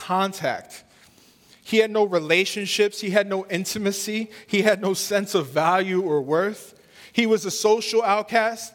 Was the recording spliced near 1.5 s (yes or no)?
no